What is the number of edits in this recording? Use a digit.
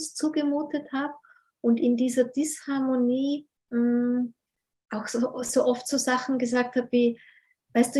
1